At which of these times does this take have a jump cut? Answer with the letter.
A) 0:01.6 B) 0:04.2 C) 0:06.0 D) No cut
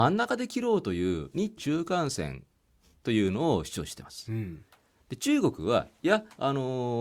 A